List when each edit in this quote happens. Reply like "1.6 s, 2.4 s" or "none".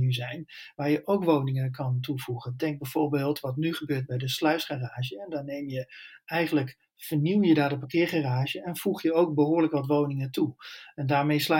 none